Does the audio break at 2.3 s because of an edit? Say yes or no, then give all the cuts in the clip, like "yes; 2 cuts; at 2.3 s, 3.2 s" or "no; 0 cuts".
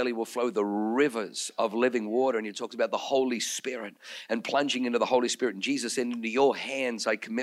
no; 0 cuts